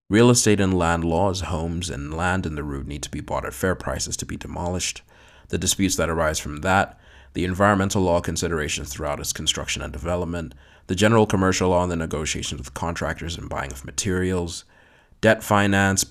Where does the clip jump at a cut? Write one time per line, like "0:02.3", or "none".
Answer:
none

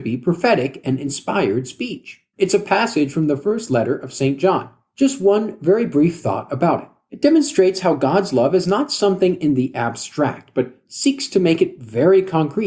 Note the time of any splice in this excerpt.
0:02.3

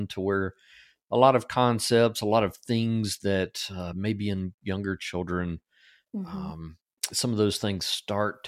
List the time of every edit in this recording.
none

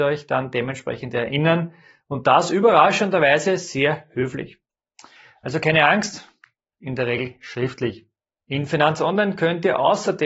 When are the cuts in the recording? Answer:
0:06.7
0:08.4

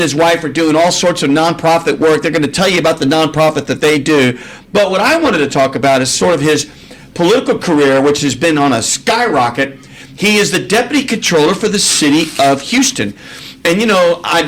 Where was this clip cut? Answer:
none

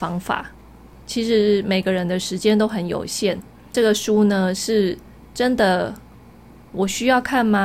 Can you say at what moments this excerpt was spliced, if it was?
0:01.0

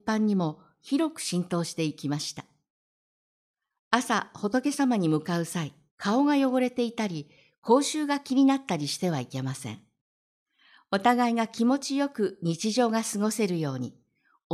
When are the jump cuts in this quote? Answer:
0:05.9

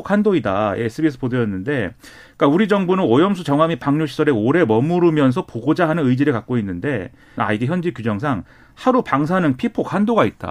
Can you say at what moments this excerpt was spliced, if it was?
0:07.4

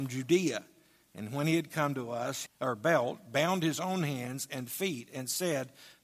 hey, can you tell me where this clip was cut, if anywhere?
0:02.5

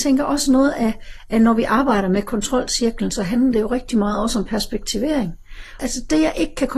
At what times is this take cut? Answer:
0:05.8

